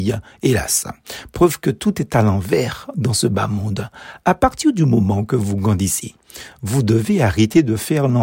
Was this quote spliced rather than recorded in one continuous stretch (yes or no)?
no